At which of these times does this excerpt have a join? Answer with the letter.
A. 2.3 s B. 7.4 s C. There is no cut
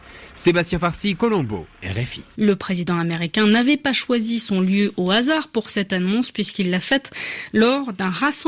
A